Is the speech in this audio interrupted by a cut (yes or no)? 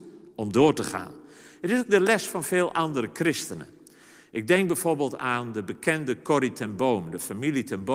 no